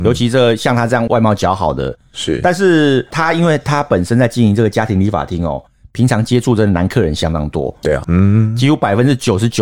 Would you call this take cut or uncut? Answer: cut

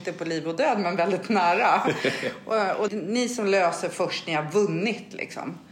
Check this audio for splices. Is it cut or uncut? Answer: cut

